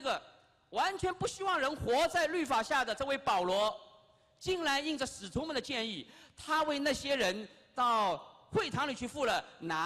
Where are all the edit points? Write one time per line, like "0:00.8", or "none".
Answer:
none